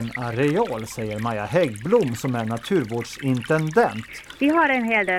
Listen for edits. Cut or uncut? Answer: uncut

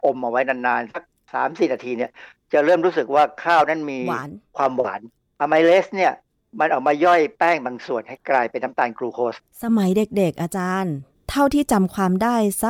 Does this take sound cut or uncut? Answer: uncut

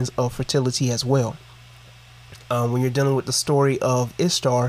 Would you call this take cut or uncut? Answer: uncut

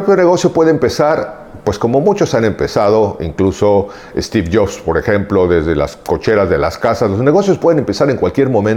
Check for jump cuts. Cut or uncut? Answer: uncut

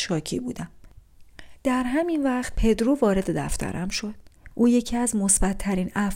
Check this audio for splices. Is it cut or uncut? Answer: cut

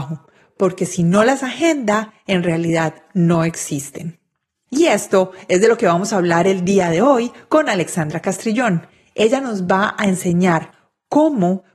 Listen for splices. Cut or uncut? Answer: uncut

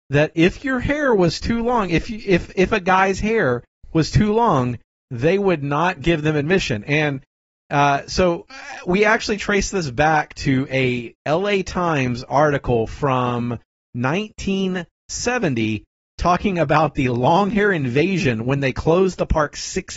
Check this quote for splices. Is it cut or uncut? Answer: uncut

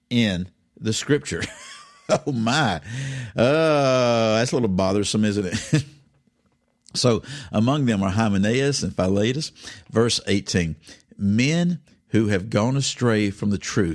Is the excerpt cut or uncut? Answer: uncut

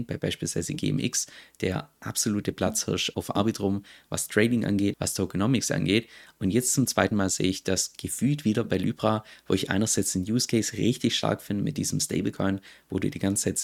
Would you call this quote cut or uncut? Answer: cut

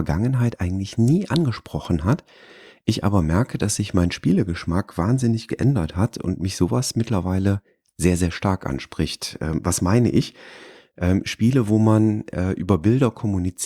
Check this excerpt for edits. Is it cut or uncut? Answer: uncut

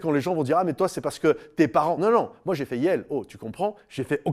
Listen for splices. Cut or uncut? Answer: uncut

